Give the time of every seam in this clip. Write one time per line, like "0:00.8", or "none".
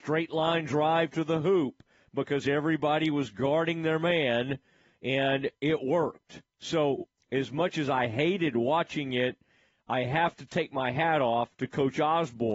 none